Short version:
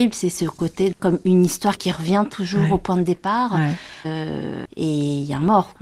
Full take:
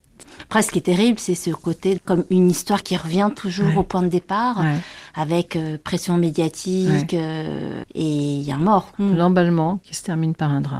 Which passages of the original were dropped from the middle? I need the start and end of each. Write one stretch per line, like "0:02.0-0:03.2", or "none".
0:05.1-0:07.2